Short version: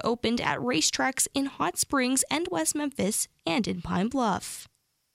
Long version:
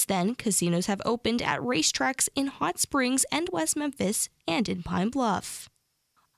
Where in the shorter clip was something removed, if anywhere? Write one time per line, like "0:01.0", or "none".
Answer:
none